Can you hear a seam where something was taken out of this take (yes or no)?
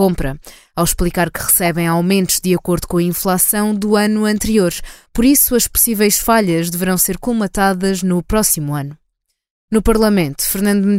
no